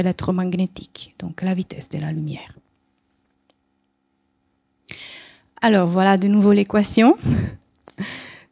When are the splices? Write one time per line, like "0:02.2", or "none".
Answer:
none